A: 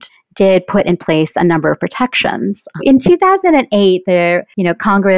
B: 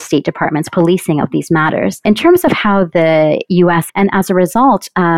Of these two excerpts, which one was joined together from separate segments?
B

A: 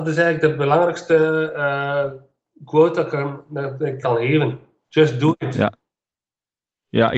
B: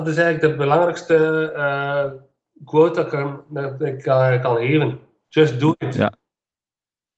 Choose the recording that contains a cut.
A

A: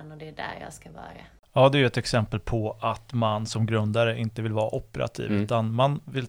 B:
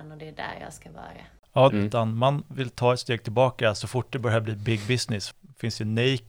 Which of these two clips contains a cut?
B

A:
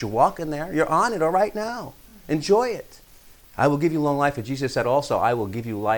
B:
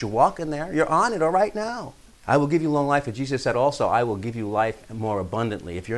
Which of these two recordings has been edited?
B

